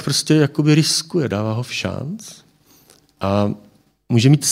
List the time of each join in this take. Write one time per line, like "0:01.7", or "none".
none